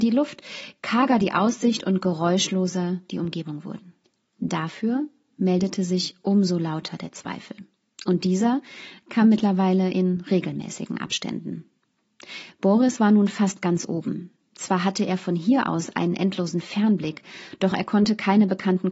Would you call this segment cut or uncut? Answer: uncut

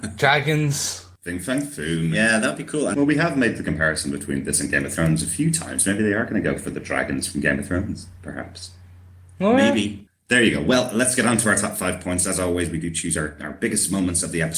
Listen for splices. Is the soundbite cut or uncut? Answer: uncut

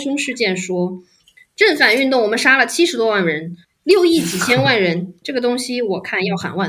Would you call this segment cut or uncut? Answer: cut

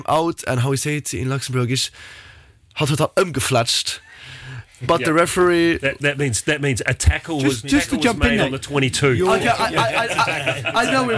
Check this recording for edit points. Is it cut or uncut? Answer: uncut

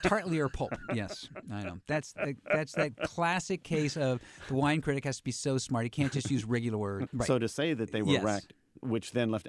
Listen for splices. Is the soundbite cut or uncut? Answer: cut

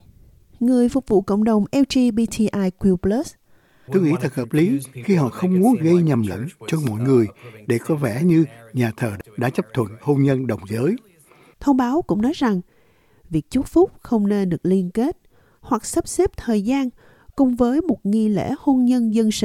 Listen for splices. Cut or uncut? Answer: cut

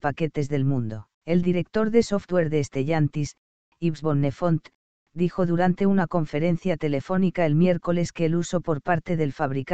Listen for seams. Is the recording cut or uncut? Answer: cut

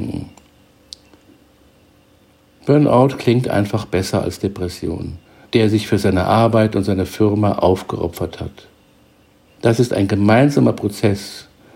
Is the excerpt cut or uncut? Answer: cut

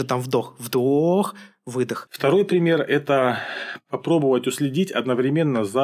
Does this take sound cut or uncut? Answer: cut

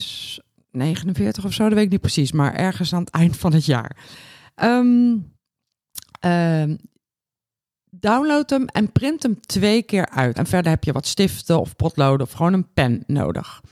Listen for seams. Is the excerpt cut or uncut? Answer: cut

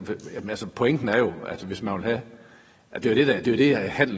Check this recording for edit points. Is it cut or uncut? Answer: uncut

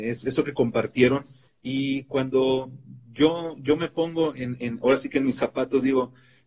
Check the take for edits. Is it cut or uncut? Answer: cut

